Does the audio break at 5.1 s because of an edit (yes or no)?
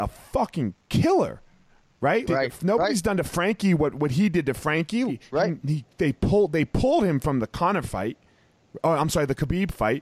yes